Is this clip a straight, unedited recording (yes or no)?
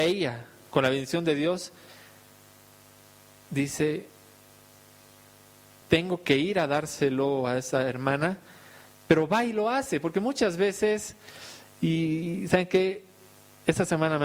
no